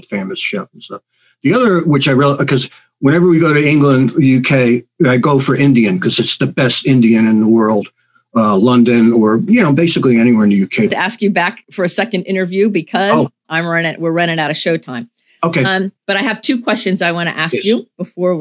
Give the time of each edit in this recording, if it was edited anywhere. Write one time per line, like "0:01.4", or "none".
0:10.9